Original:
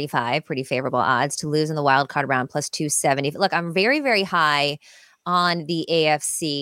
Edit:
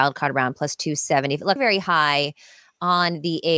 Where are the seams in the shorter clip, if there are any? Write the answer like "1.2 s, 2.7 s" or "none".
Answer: 1.6 s